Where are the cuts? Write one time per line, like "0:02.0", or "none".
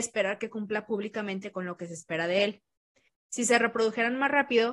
0:03.2